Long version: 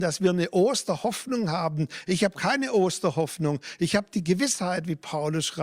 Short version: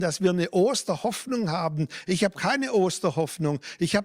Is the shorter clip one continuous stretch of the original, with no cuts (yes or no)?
yes